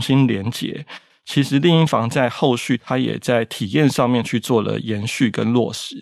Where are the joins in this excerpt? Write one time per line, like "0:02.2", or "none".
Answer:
0:01.1